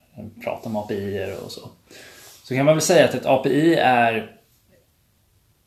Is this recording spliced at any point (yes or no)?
no